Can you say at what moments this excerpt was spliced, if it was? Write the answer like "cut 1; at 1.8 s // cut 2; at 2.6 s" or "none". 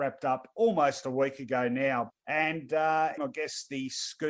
cut 1; at 2.1 s // cut 2; at 3.2 s